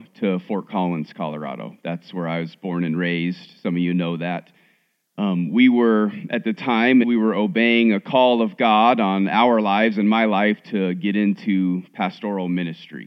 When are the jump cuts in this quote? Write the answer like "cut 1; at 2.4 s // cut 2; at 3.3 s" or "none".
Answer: cut 1; at 7.0 s